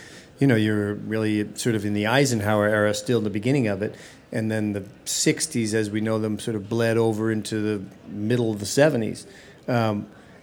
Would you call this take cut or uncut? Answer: uncut